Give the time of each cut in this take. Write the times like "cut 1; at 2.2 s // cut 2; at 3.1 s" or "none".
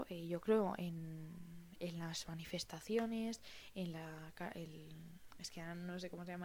cut 1; at 1.8 s // cut 2; at 5.3 s